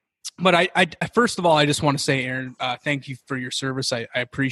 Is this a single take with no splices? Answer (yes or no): yes